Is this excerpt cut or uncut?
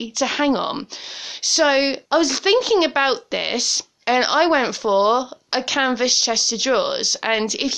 cut